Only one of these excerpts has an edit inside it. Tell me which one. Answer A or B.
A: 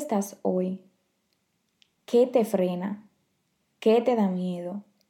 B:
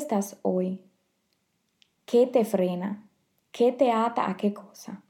B